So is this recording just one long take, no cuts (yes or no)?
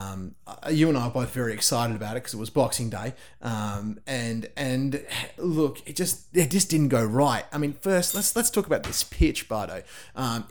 yes